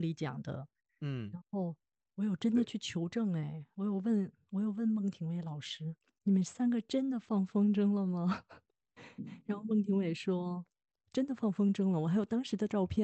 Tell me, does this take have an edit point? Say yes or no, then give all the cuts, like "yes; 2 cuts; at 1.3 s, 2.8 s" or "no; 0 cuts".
no; 0 cuts